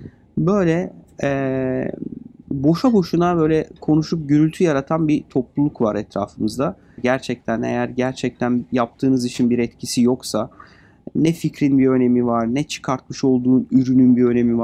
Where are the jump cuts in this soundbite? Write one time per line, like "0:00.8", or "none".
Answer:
0:02.4
0:07.0